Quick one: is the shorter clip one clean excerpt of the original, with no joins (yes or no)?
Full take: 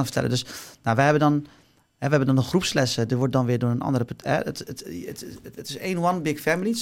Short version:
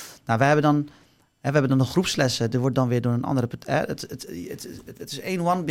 yes